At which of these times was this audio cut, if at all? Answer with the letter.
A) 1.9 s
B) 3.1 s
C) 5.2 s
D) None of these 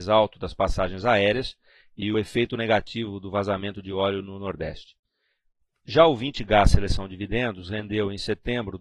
D